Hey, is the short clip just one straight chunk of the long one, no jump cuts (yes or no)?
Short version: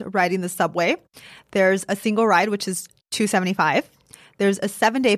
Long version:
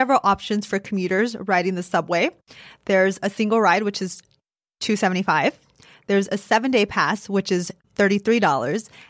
no